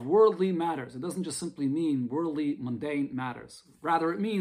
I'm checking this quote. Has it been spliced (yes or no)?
no